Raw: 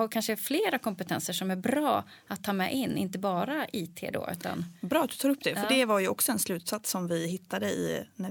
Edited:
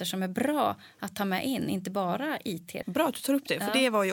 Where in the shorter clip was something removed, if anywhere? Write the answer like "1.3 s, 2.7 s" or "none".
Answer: 2.8 s